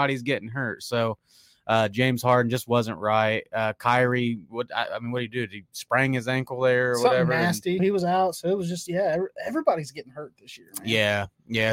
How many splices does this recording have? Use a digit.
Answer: 1